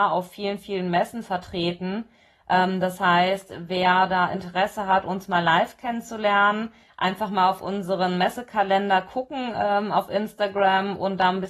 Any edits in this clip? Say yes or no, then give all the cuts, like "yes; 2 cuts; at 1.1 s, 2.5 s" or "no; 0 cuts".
no; 0 cuts